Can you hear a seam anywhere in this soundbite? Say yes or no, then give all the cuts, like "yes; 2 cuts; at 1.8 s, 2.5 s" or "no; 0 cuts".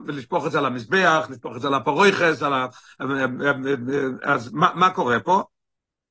no; 0 cuts